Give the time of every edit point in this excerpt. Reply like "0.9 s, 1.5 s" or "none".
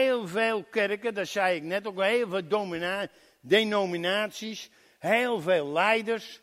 none